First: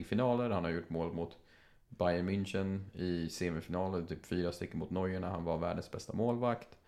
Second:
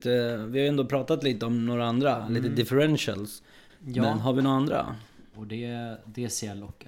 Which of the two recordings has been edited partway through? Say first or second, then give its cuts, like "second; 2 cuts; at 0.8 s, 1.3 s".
second; 2 cuts; at 3.7 s, 5.3 s